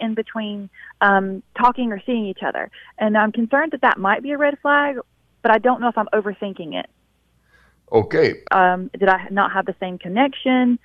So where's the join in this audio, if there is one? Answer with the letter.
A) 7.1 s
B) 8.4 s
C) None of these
B